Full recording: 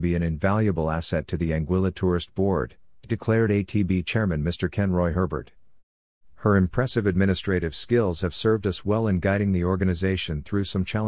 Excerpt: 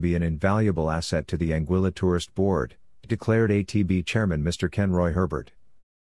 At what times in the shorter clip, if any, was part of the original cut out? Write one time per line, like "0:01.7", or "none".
none